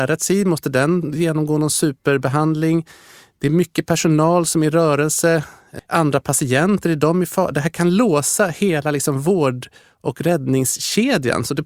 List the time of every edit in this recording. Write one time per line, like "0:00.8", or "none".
0:05.8